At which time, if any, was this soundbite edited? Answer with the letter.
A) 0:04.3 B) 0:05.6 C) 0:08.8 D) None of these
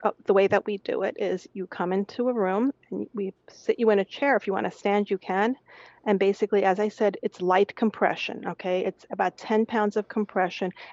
D